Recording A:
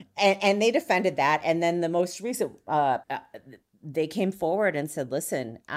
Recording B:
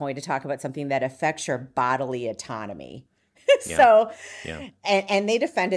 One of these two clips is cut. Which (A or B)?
A